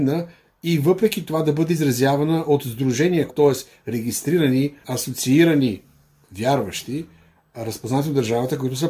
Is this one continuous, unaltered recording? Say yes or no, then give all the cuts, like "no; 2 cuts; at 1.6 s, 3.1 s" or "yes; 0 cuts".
no; 1 cut; at 3.3 s